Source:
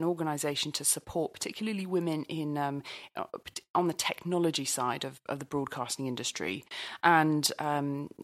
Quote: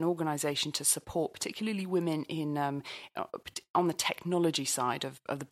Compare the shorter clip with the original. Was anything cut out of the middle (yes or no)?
no